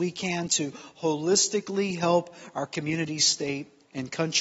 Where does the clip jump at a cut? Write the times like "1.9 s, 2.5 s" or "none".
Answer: none